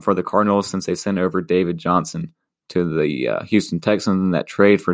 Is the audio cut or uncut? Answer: uncut